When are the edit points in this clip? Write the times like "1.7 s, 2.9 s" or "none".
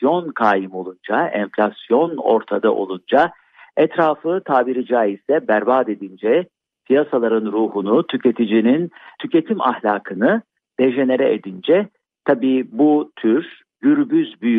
none